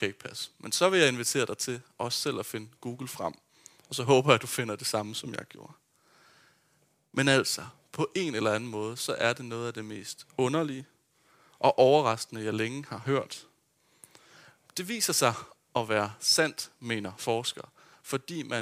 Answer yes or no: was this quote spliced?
no